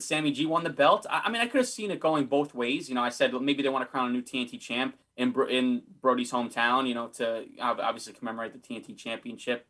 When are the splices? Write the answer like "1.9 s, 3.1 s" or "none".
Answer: none